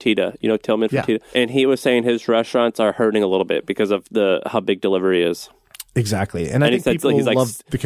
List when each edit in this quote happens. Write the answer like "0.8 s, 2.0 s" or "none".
none